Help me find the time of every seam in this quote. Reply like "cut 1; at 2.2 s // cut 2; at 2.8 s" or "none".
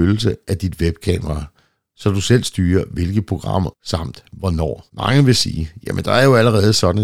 cut 1; at 3.7 s // cut 2; at 4.9 s